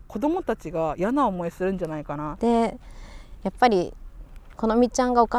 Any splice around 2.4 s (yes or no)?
yes